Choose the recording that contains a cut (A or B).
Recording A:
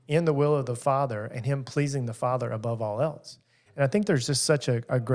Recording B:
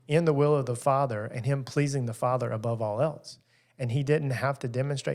A